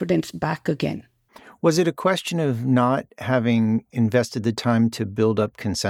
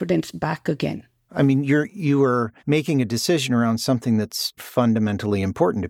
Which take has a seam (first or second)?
second